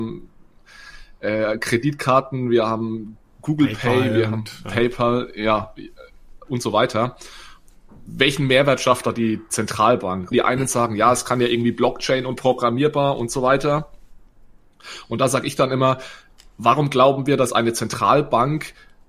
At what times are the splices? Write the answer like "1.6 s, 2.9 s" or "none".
10.3 s